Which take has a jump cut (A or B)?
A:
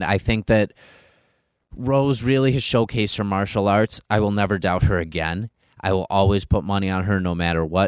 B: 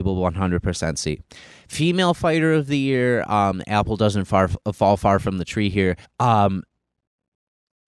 B